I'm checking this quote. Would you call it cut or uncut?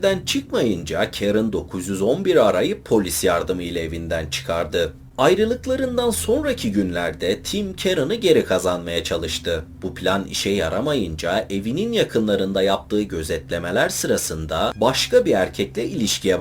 uncut